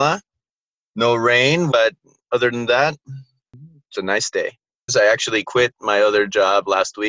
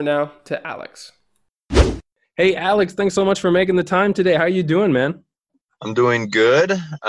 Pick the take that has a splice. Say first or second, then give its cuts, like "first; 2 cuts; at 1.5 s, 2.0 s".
first; 2 cuts; at 1.7 s, 4.9 s